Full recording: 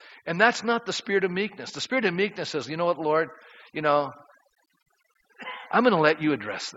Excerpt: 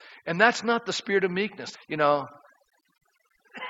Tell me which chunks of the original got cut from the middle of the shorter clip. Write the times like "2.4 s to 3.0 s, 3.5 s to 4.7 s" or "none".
1.7 s to 3.6 s

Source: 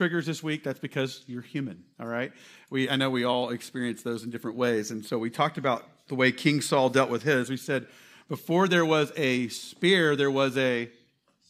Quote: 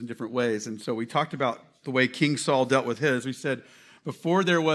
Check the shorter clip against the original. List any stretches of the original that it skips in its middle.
none

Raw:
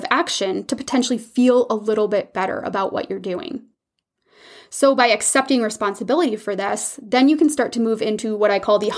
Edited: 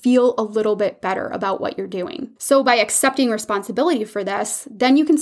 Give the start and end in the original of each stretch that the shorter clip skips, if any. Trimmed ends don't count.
3.7 s to 4.7 s

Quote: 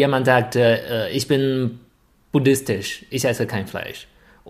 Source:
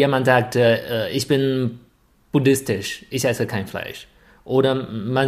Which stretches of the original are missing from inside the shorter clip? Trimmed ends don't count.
none

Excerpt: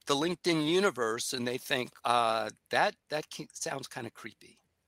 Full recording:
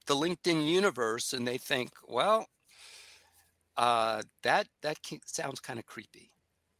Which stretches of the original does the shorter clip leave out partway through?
2.0 s to 3.7 s

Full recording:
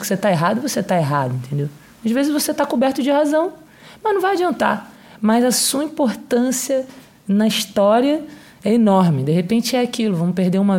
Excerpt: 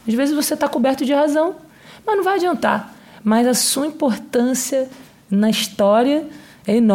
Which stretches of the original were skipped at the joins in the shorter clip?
none

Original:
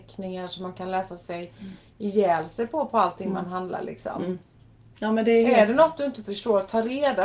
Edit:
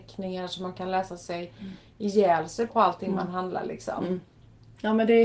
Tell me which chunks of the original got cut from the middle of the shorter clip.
2.7 s to 2.9 s

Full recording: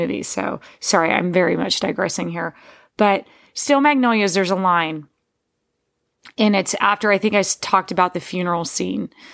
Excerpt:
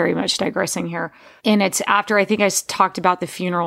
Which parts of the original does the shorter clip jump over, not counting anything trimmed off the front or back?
2.8 s to 6.3 s

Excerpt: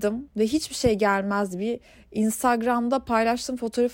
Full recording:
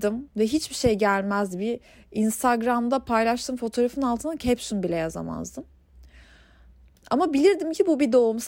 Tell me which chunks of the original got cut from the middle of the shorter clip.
none

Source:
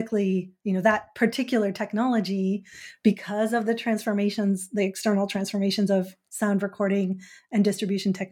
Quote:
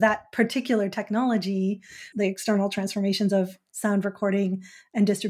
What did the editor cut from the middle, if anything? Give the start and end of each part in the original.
2.9 s to 4.7 s

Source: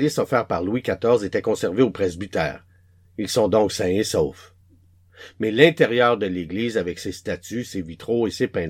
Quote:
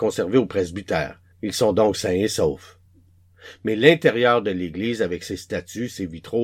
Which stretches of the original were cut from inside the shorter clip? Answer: 2.8 s to 3.1 s

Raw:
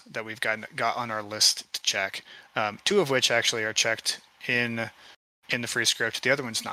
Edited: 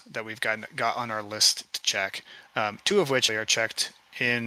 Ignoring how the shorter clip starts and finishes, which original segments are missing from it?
3.3 s to 3.6 s

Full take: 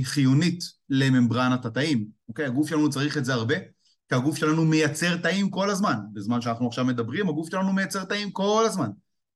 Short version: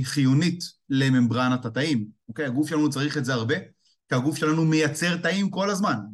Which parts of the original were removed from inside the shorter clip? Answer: none

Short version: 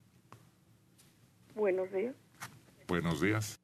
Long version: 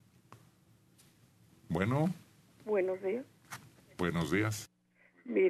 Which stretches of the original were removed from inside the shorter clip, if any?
1.4 s to 2.5 s

